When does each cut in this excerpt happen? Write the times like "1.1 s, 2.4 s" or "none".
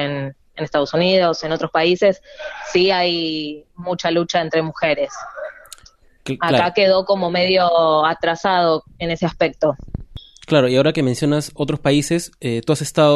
none